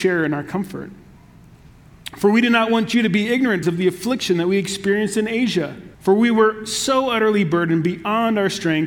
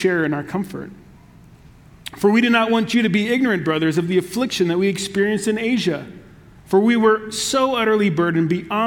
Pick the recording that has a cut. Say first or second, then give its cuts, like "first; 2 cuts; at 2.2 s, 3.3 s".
first; 2 cuts; at 3.6 s, 5.9 s